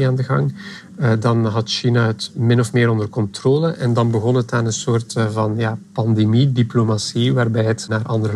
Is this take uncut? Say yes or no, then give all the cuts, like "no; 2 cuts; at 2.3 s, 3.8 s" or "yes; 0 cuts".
yes; 0 cuts